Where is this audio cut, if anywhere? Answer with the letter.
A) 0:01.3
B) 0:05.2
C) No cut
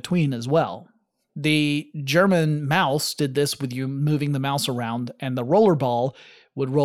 A